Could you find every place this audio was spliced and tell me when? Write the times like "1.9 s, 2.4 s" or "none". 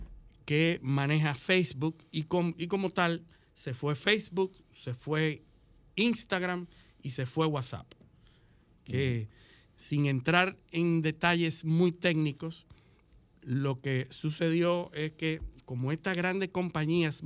none